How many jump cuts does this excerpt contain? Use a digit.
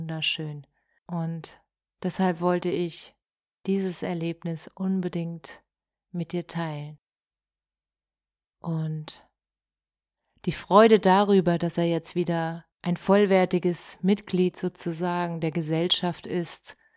3